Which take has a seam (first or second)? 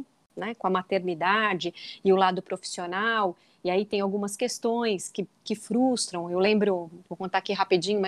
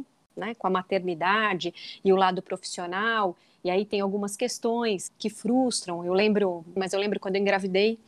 second